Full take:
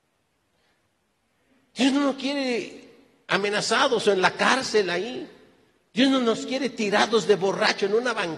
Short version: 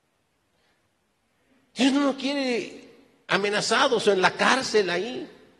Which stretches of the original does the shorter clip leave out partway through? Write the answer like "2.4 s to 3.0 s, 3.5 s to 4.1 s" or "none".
none